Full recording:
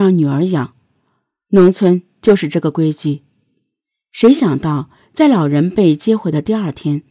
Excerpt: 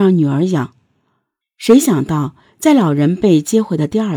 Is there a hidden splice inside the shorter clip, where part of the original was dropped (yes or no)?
yes